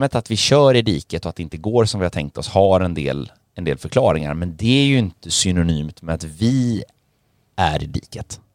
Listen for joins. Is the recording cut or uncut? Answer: uncut